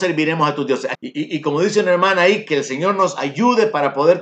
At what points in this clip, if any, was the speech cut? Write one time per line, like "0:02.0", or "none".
0:00.9

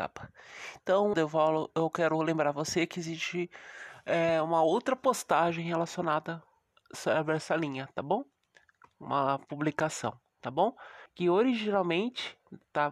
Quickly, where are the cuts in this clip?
0:01.1
0:11.1

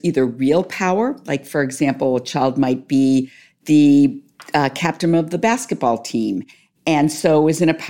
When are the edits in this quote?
none

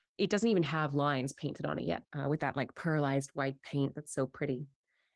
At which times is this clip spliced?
0:02.0

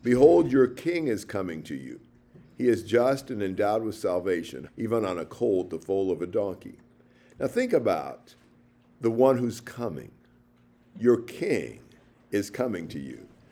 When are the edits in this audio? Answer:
0:04.7

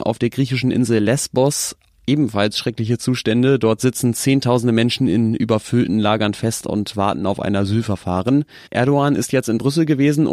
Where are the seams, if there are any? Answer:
0:08.7

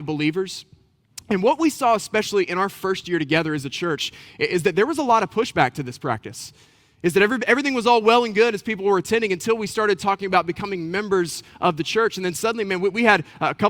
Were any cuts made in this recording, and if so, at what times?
none

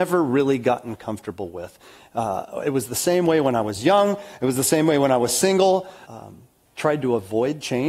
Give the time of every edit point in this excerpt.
0:06.0

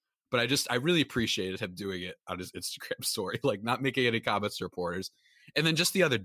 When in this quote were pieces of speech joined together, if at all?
none

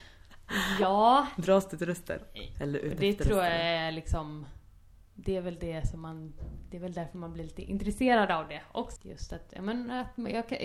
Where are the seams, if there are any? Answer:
0:02.6
0:09.0

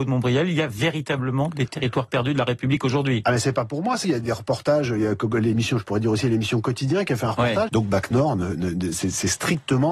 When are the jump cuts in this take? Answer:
0:04.0
0:07.7

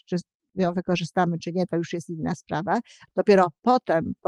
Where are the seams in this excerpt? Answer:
0:03.1

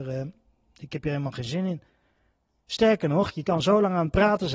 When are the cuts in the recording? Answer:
none

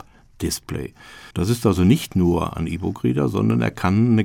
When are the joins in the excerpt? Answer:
0:01.3

